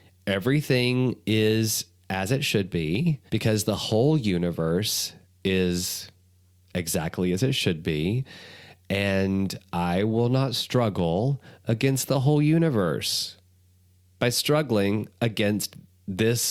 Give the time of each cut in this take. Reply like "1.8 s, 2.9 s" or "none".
3.3 s